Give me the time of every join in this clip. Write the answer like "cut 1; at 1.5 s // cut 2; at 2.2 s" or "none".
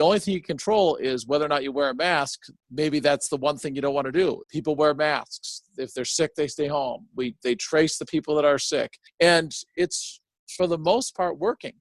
cut 1; at 4.4 s